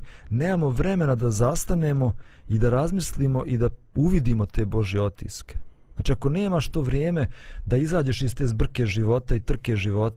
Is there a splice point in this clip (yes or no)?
no